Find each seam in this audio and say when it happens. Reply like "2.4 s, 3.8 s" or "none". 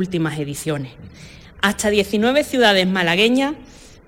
none